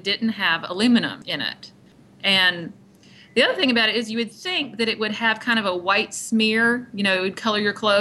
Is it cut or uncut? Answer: uncut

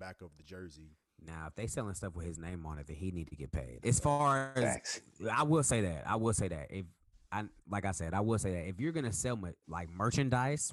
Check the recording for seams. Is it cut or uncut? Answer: cut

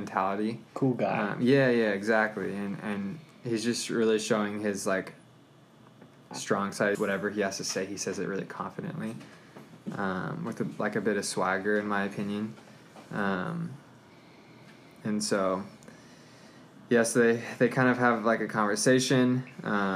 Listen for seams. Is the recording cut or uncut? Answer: cut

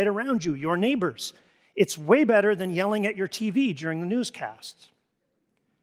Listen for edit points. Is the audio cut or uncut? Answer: uncut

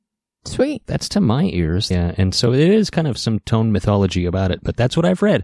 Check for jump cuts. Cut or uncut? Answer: cut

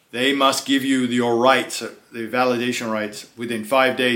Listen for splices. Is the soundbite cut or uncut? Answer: uncut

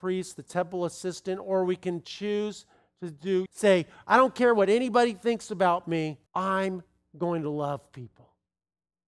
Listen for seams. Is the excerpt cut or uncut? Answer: cut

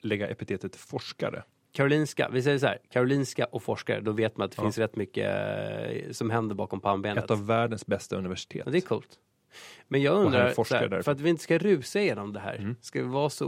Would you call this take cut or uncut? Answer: uncut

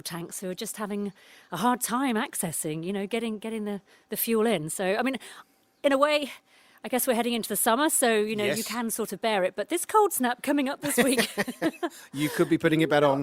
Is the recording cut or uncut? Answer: uncut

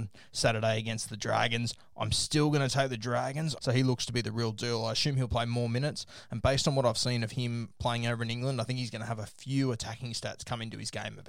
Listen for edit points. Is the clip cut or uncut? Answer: cut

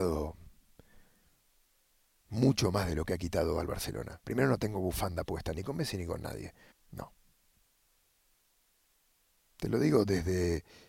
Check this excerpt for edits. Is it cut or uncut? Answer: cut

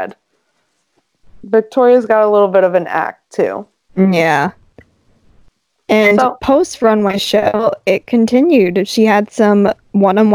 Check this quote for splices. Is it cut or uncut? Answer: uncut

